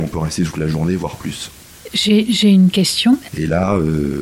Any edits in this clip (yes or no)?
yes